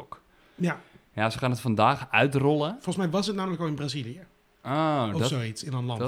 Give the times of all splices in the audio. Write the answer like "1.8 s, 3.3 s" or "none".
none